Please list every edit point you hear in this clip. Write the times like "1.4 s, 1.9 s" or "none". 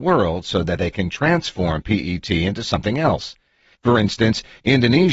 3.8 s